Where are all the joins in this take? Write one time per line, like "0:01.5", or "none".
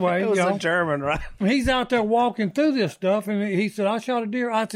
0:01.4